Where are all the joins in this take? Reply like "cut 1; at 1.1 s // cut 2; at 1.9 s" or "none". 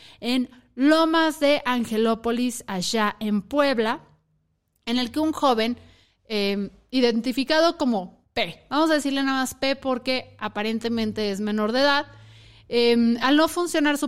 none